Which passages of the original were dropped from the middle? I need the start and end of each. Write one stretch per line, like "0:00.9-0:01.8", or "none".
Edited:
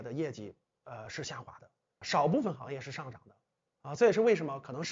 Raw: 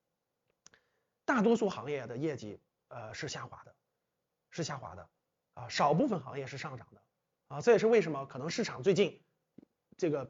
0:04.1-0:05.7

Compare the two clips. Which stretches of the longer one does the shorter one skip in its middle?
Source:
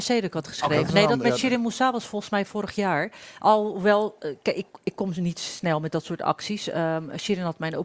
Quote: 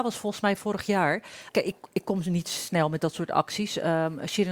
0:03.4-0:04.4

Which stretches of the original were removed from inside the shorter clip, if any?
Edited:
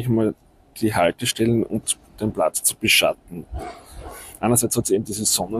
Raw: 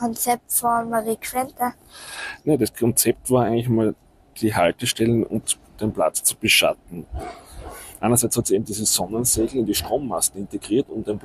none

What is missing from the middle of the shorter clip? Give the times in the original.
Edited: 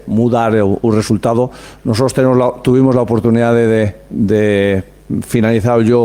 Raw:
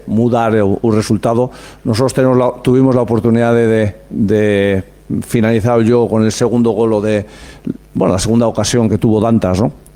none

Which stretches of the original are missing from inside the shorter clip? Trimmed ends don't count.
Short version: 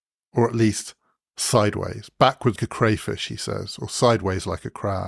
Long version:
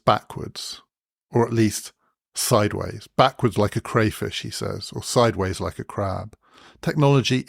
0:03.5-0:03.7

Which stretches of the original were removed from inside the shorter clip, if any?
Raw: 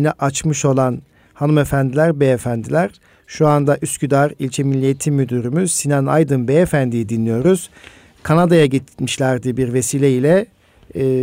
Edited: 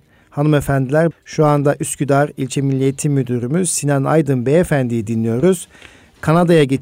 0:02.1-0:03.1

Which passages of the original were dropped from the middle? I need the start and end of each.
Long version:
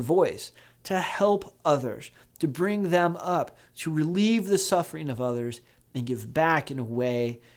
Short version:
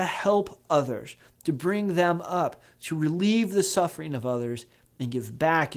none

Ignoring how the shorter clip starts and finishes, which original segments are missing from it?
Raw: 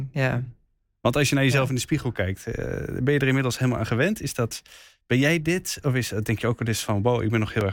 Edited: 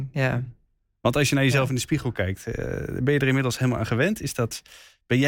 none

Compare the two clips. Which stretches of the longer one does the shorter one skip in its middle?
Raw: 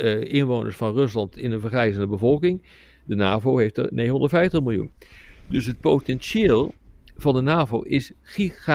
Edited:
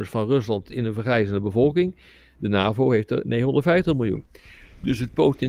none

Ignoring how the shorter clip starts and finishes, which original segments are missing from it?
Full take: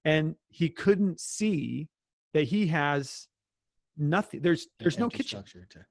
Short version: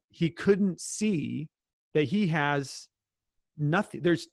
none

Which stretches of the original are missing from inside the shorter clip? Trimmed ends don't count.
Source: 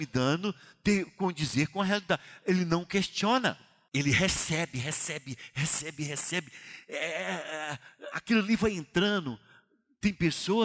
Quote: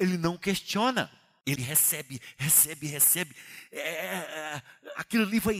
0:04.0-0:04.7

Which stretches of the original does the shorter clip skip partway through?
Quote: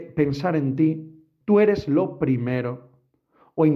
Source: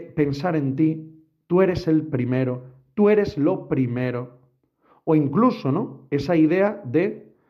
0:01.4-0:02.9

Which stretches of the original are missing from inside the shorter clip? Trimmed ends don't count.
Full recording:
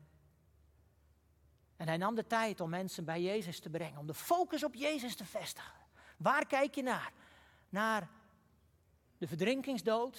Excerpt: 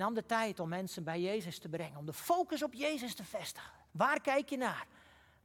0:05.9-0:06.1

